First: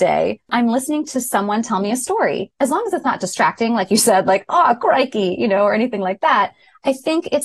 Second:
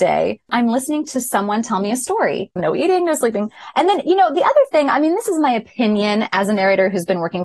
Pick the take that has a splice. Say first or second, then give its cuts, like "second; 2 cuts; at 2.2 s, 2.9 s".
second; 1 cut; at 2.6 s